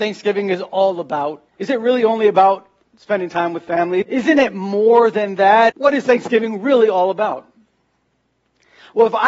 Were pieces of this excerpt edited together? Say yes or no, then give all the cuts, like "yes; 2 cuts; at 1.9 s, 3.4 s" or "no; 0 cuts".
yes; 3 cuts; at 1.5 s, 4.0 s, 5.7 s